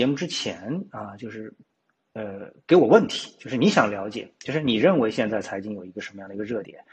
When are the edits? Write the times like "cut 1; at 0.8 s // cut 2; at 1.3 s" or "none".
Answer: none